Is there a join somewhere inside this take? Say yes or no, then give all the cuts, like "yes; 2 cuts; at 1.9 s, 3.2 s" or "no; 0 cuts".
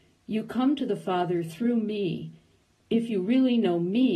no; 0 cuts